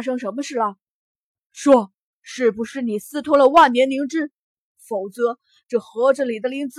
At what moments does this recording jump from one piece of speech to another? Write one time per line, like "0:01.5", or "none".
none